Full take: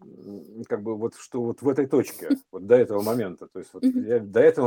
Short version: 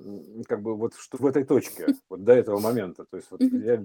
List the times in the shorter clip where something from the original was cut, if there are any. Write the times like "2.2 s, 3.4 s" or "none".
1.1 s